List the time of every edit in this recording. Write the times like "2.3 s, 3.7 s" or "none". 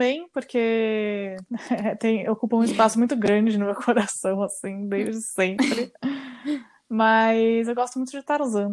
none